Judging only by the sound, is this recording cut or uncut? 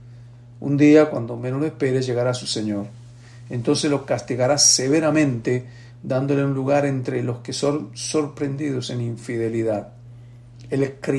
uncut